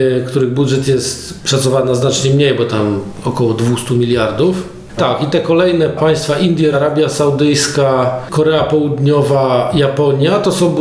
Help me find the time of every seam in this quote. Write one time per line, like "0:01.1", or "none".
0:05.0
0:06.7